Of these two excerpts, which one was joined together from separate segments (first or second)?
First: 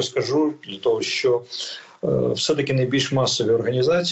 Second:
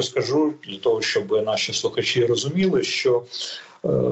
first